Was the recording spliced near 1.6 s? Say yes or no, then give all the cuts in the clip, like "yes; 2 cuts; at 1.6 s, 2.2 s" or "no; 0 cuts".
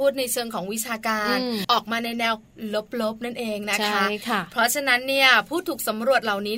yes; 1 cut; at 1.6 s